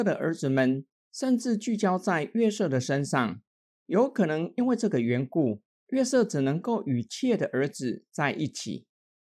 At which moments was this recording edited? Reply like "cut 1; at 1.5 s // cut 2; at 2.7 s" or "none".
cut 1; at 3.7 s